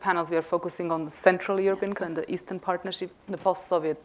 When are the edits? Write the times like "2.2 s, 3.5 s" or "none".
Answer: 2.0 s, 3.1 s